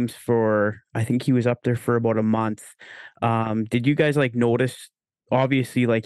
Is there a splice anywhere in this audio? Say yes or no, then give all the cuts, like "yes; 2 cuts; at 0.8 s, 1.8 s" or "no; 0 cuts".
no; 0 cuts